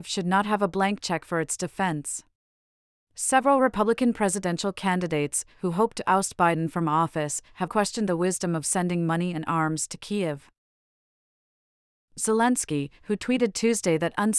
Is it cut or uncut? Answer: cut